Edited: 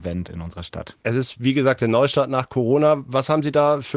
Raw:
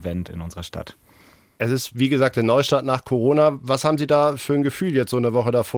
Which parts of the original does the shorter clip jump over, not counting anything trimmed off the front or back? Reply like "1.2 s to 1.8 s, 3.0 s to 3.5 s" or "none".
1.0 s to 1.6 s